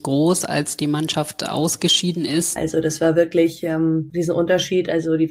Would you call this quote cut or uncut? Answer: cut